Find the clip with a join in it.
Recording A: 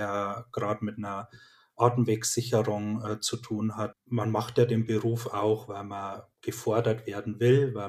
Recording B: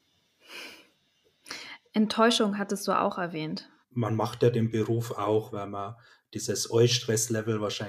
B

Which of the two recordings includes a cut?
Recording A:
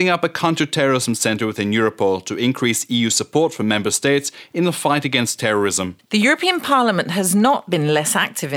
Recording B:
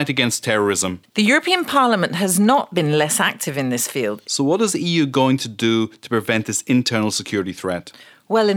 B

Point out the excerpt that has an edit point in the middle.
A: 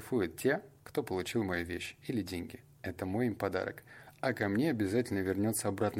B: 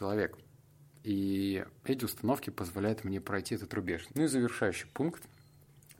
B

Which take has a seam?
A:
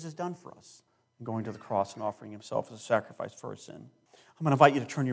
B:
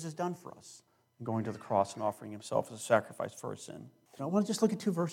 B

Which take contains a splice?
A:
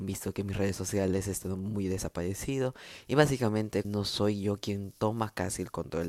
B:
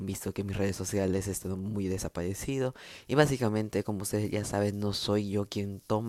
A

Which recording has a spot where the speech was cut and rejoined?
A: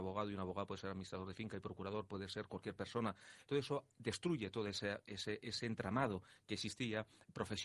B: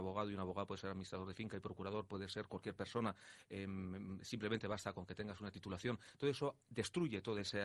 A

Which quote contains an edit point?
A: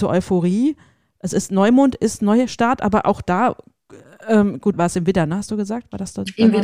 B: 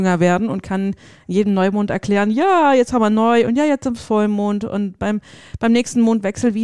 A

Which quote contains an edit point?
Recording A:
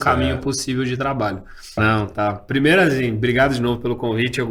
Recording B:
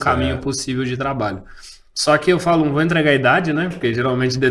A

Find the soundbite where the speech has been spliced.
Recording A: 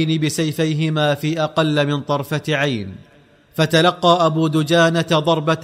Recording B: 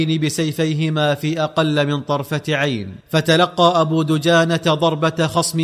B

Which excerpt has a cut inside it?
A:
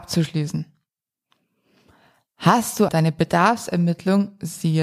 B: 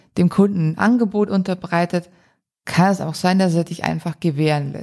A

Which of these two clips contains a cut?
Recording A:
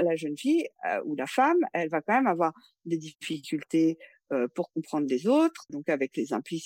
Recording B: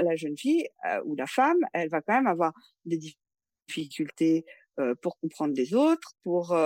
A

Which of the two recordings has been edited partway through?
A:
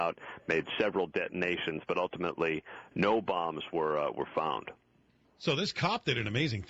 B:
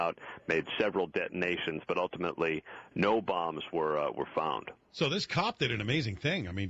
B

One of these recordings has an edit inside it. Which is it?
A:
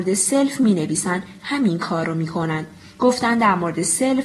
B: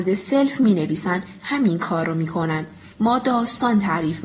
B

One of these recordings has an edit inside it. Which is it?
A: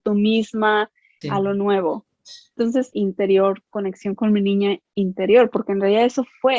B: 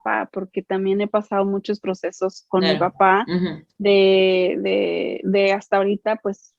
A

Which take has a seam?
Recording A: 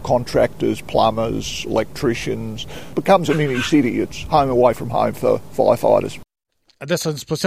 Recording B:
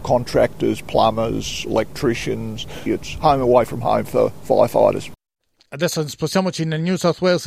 B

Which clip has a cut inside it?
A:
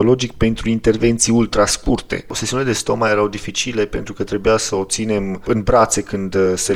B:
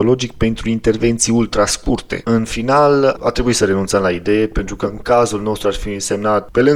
B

